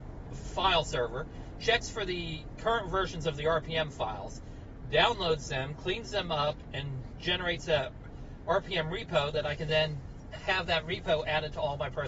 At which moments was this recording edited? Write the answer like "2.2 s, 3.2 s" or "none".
none